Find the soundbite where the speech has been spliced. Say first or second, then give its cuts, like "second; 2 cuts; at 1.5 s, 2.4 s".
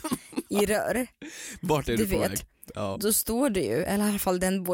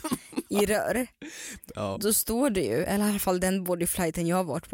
second; 1 cut; at 1.6 s